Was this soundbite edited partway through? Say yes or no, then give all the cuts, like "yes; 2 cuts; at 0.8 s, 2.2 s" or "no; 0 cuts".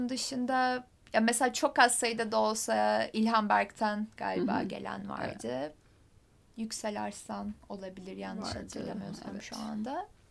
no; 0 cuts